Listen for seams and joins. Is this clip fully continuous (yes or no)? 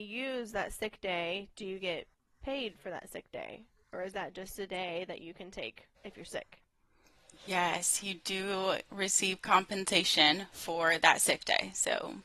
no